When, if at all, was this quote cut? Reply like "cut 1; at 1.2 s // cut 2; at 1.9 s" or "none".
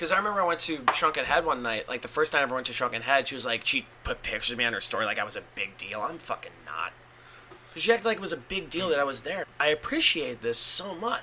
cut 1; at 7.6 s // cut 2; at 9.4 s

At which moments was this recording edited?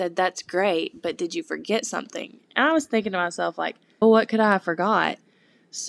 cut 1; at 4.0 s

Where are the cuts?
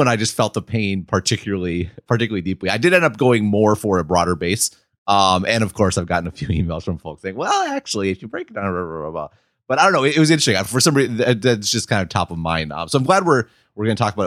none

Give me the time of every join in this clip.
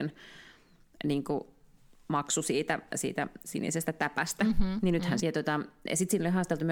cut 1; at 5.2 s

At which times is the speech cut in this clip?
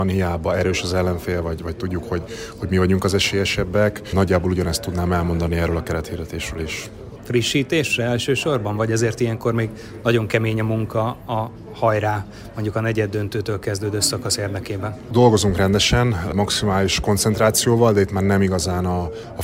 cut 1; at 7.2 s

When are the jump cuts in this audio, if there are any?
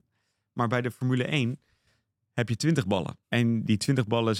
cut 1; at 3.2 s

